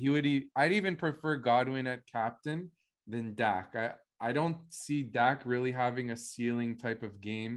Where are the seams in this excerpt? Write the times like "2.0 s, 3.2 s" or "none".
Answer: none